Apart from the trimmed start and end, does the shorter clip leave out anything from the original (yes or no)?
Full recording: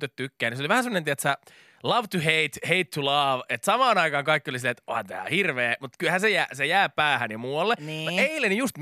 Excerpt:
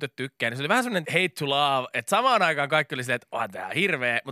yes